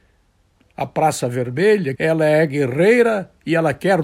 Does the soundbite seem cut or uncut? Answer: cut